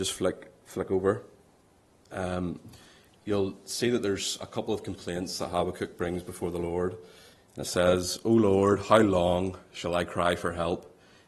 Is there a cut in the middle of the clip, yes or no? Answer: yes